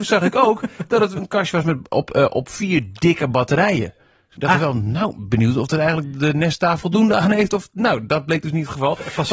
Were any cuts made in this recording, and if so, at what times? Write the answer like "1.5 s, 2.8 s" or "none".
none